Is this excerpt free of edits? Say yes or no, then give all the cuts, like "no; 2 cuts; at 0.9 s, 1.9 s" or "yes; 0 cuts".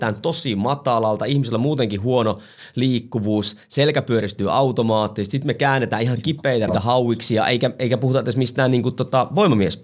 no; 1 cut; at 6.7 s